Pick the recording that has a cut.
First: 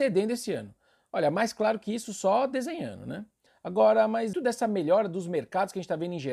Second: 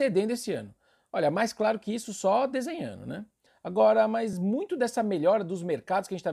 first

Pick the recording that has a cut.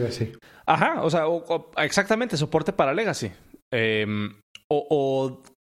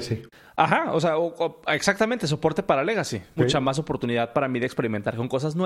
second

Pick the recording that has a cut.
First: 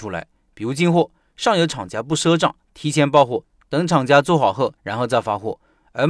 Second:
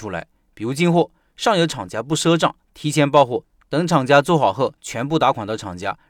first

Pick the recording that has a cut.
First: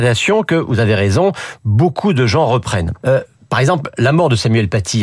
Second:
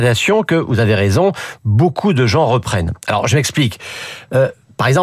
first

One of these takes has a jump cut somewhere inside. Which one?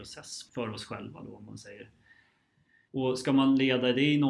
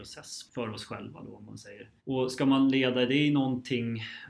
second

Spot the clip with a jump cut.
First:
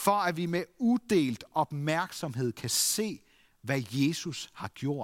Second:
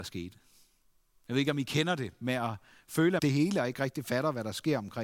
second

